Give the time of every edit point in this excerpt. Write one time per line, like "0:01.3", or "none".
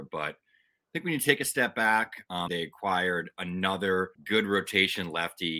0:02.5
0:04.1